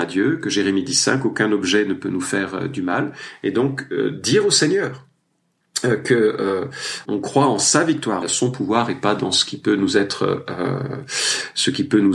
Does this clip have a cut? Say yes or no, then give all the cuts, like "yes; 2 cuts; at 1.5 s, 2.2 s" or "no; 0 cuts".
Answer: yes; 2 cuts; at 7.0 s, 8.2 s